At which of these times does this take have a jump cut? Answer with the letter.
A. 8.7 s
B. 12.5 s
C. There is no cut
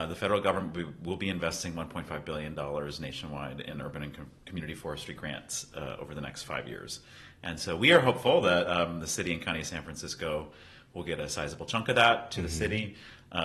C